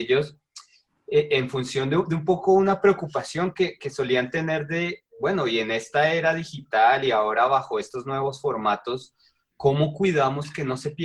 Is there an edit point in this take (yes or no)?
no